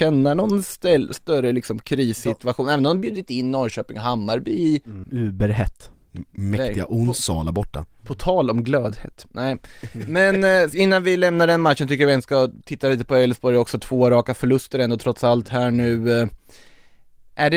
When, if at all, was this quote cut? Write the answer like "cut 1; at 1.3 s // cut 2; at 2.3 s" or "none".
cut 1; at 5.0 s

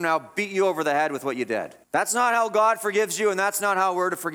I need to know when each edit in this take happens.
cut 1; at 1.8 s

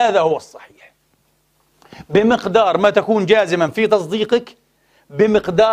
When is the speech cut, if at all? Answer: none

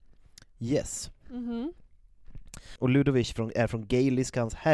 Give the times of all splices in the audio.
cut 1; at 1.2 s // cut 2; at 2.8 s

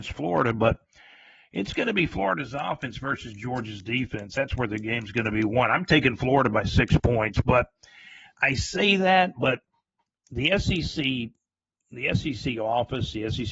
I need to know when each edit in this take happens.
none

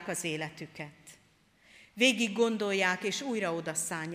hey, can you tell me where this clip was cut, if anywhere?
none

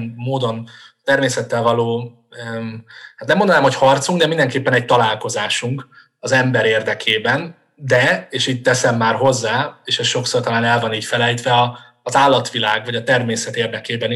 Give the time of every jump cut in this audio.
none

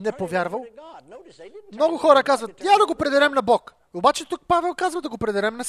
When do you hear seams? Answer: none

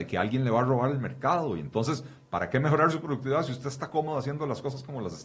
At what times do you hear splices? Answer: none

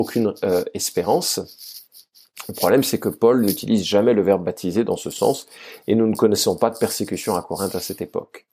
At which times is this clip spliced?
none

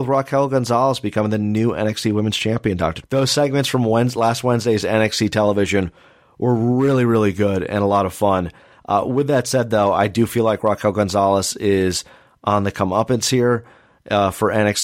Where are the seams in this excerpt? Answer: cut 1; at 3.0 s

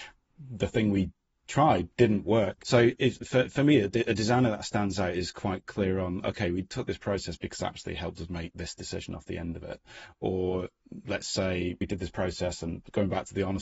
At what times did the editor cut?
cut 1; at 2.6 s

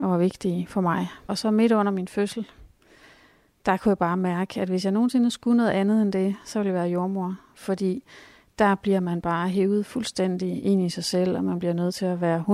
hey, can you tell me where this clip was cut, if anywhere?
cut 1; at 1.3 s

